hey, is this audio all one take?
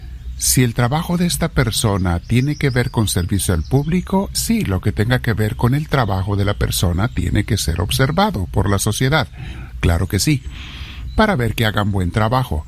no; 1 cut; at 4.3 s

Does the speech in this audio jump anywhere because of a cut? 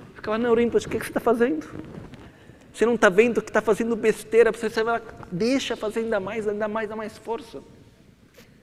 yes; 1 cut; at 2.7 s

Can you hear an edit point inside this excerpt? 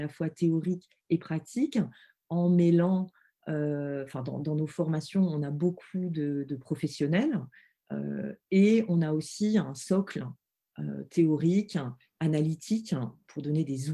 no; 0 cuts

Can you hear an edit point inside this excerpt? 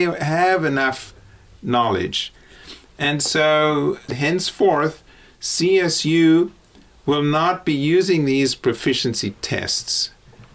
no; 0 cuts

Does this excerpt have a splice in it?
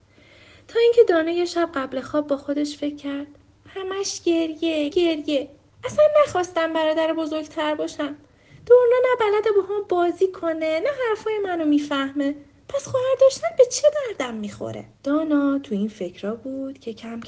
yes; 2 cuts; at 4.9 s, 14.9 s

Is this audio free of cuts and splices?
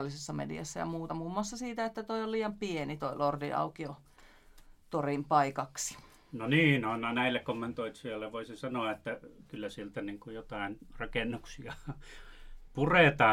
yes; 0 cuts

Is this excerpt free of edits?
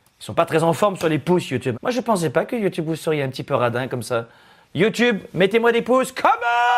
no; 2 cuts; at 1.7 s, 4.6 s

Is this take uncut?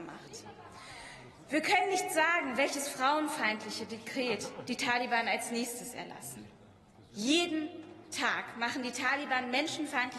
yes; 0 cuts

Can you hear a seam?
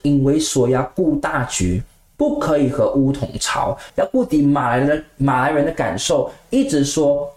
yes; 1 cut; at 3.9 s

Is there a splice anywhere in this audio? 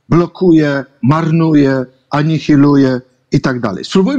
no; 0 cuts

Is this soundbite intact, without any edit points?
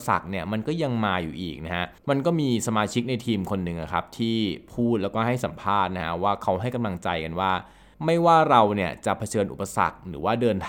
no; 1 cut; at 2.0 s

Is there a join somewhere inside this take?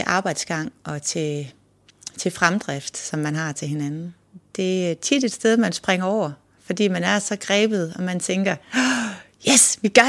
no; 0 cuts

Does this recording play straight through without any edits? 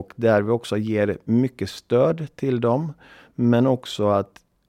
yes; 0 cuts

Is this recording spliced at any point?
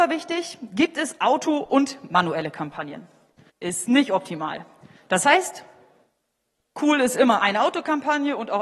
yes; 2 cuts; at 3.5 s, 5.0 s

